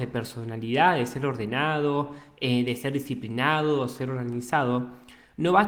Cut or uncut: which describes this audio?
uncut